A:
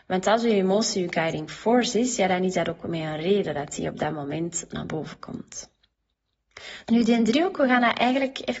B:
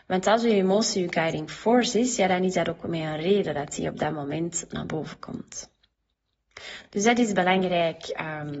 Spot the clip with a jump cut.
A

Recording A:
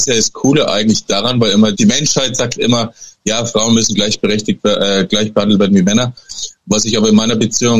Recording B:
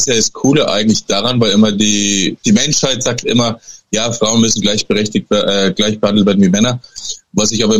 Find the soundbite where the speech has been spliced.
A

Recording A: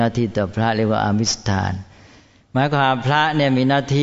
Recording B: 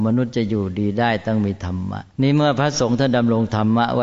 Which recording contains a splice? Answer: B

